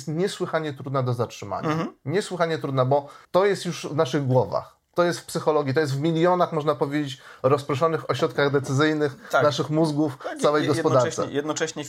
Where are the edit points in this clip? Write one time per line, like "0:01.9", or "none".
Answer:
0:03.2